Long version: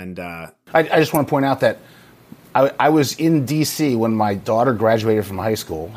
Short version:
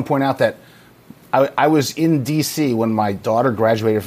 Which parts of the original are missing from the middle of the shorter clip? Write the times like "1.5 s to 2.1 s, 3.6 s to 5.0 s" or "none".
none